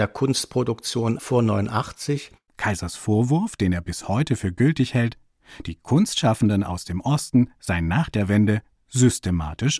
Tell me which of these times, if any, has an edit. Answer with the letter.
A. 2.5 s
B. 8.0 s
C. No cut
A